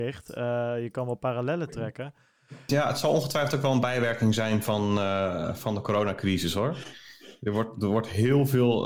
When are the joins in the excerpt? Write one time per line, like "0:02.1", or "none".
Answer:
0:02.7